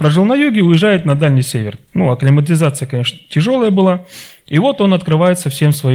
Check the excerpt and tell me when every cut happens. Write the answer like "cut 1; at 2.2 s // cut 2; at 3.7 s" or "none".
cut 1; at 1.9 s